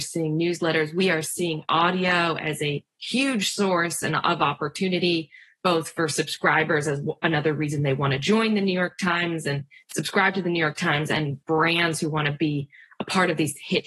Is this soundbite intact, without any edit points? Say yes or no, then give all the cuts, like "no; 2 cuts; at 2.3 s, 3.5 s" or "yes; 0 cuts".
yes; 0 cuts